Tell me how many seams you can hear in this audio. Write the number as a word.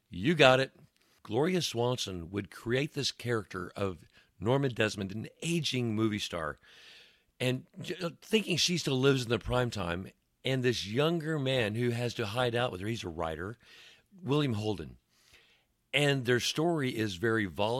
one